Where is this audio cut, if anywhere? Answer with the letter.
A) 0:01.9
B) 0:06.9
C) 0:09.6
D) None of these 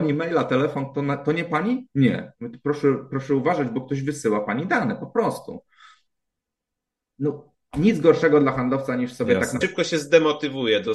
C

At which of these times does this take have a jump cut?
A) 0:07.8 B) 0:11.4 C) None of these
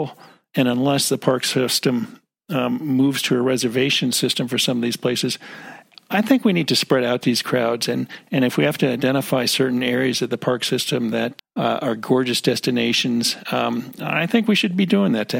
B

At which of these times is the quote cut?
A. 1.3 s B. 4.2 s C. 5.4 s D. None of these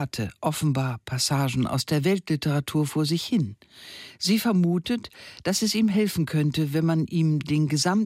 D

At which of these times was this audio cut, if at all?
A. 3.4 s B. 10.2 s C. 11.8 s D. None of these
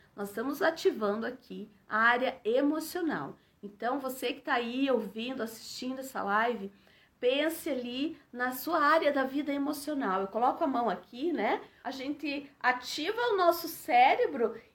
C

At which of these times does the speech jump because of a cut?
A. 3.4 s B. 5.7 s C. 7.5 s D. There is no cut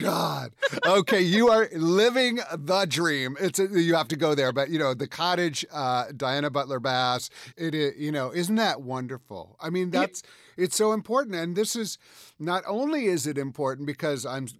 C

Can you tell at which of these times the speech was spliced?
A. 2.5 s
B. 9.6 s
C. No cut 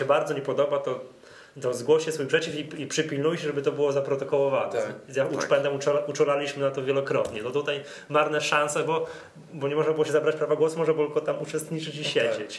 C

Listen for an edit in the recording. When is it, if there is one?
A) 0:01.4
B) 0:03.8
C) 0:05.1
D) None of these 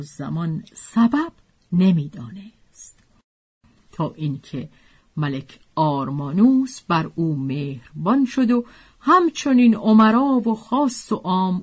B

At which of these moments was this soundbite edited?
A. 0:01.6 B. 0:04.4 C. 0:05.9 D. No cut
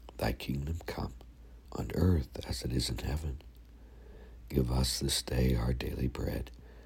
A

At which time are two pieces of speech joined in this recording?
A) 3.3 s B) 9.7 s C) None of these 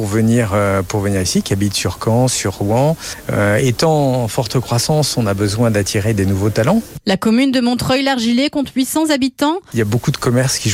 B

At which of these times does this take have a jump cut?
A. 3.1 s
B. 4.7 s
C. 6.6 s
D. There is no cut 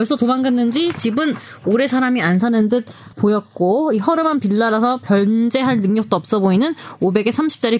A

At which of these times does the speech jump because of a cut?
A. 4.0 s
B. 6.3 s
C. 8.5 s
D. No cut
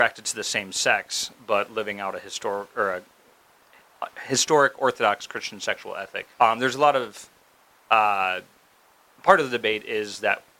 B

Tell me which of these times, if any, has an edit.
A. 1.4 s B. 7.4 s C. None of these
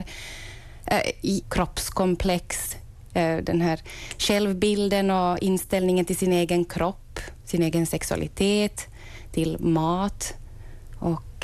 A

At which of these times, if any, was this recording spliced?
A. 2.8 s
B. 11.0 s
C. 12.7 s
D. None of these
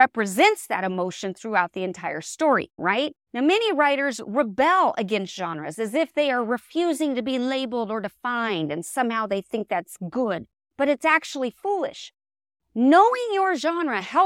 A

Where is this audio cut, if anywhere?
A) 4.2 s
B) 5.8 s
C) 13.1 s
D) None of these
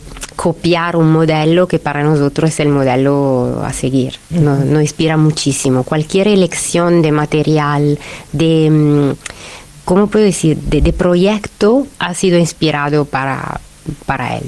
A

